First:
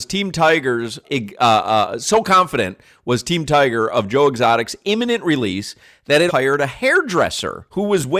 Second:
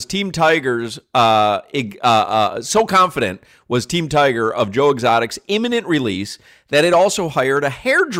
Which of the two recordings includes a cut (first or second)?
first